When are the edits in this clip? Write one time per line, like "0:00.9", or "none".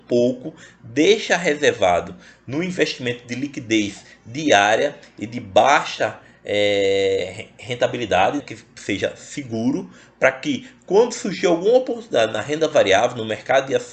0:08.4